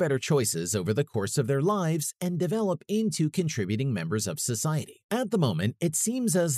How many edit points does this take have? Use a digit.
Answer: 1